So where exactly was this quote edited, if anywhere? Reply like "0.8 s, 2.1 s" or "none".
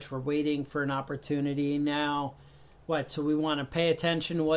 none